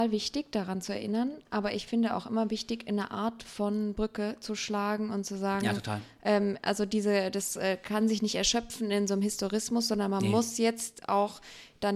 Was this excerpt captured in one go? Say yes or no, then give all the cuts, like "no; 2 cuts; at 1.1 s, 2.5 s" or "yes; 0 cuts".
yes; 0 cuts